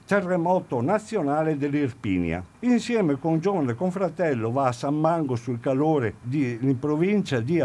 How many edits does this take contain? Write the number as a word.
two